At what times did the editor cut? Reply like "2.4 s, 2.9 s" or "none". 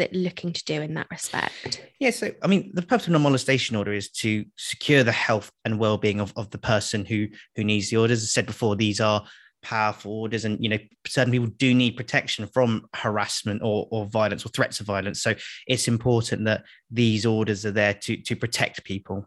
13.9 s